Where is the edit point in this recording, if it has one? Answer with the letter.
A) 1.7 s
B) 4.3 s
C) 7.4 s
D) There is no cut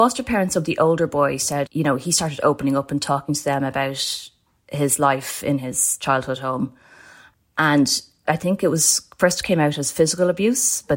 A